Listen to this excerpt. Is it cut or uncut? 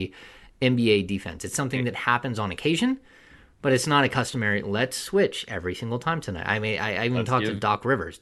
uncut